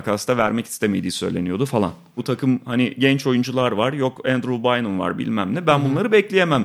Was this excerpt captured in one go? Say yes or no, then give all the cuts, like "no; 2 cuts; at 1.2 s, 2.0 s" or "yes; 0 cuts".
no; 1 cut; at 2.2 s